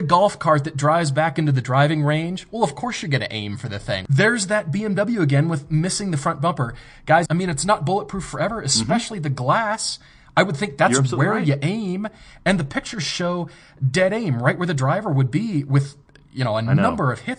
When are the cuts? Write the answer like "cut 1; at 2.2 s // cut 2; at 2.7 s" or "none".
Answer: cut 1; at 7.3 s